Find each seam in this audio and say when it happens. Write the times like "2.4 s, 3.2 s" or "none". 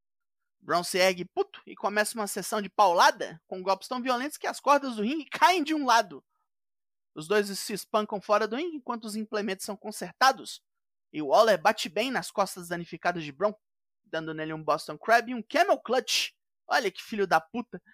none